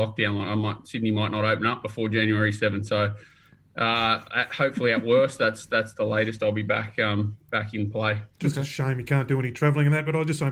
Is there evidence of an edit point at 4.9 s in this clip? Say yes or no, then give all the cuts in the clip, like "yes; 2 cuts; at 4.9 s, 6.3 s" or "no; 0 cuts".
no; 1 cut; at 8.3 s